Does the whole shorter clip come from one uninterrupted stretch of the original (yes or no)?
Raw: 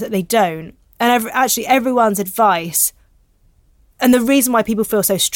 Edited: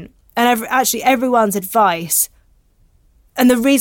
yes